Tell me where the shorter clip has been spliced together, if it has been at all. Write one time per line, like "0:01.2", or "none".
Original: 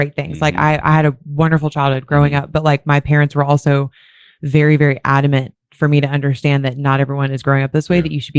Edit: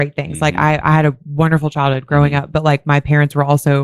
none